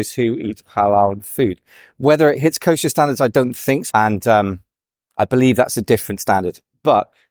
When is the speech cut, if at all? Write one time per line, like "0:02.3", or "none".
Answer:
0:03.9